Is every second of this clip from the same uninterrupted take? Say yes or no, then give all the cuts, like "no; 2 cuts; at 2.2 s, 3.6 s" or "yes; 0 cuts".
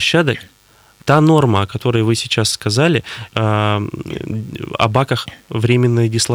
no; 2 cuts; at 1.0 s, 3.3 s